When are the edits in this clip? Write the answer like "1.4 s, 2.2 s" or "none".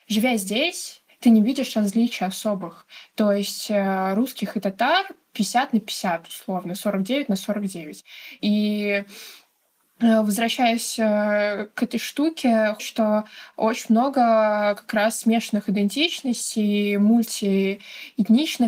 8.4 s, 12.8 s